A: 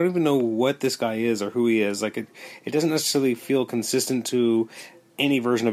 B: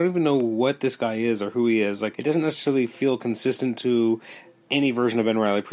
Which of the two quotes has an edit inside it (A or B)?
B